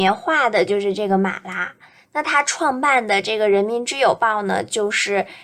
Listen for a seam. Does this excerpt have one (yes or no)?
no